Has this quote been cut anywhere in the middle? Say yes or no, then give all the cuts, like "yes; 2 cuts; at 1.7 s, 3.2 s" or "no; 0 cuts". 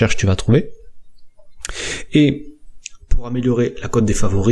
yes; 1 cut; at 2.1 s